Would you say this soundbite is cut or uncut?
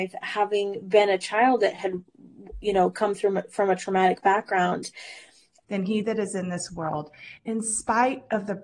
cut